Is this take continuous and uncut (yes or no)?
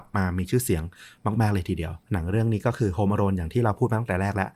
no